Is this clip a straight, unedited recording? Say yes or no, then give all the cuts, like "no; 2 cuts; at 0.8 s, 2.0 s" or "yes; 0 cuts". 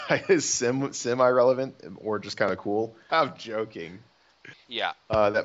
no; 2 cuts; at 3.1 s, 4.5 s